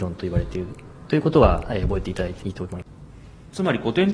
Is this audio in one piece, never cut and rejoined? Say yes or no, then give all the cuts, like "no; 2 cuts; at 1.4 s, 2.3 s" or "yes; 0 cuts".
no; 1 cut; at 2.4 s